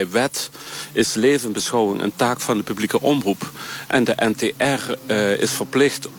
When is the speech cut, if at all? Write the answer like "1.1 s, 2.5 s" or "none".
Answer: none